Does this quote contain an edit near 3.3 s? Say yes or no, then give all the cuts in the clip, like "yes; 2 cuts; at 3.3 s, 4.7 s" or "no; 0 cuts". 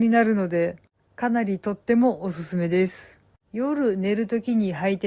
yes; 1 cut; at 3.3 s